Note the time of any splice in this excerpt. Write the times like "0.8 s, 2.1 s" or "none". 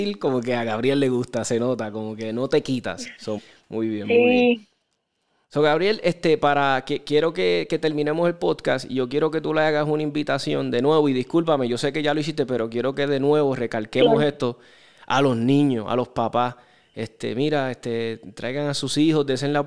3.4 s